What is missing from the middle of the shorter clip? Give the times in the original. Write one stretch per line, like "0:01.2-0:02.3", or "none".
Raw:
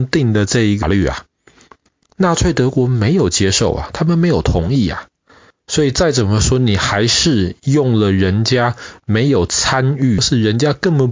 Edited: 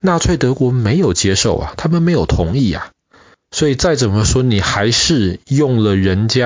none